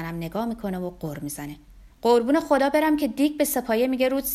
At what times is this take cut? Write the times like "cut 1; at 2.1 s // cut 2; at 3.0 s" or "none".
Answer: cut 1; at 1.9 s